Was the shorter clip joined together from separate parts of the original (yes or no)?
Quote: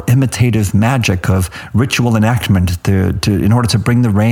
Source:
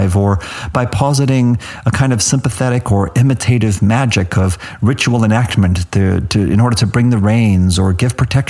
no